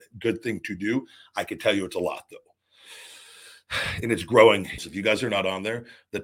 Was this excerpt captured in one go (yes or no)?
no